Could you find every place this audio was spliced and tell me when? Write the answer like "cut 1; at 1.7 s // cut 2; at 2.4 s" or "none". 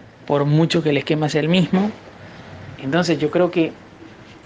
cut 1; at 2.8 s